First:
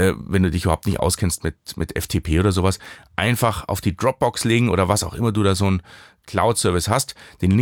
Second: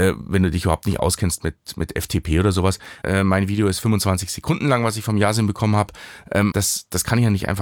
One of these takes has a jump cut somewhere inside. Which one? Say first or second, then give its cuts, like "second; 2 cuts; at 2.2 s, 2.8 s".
second; 2 cuts; at 3.0 s, 6.5 s